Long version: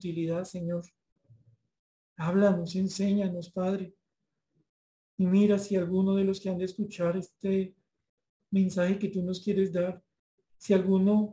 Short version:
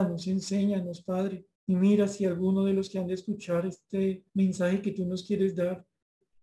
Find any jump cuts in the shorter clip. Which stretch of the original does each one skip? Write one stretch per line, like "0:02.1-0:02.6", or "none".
0:04.0-0:05.1
0:07.8-0:08.5